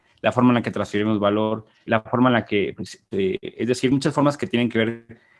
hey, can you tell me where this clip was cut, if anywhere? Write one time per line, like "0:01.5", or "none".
0:01.9
0:03.1